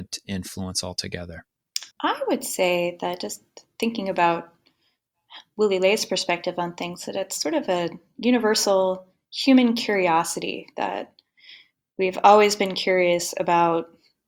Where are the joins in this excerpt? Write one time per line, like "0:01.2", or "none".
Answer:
0:01.9